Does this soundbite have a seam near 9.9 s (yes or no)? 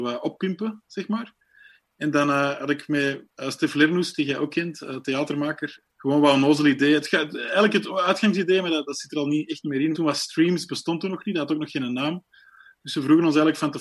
yes